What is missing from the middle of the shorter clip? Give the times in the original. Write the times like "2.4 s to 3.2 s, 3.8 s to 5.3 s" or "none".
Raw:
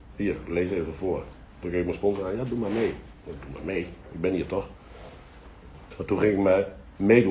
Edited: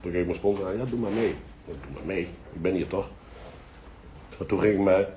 none